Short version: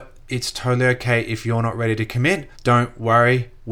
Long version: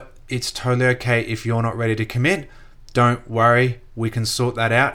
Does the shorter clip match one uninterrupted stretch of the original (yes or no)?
no